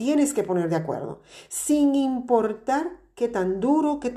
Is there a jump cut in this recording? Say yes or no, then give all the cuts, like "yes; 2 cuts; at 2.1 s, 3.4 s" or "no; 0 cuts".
no; 0 cuts